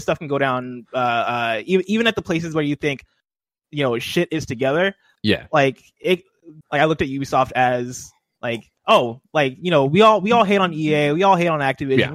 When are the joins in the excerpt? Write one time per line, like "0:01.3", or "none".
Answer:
0:06.6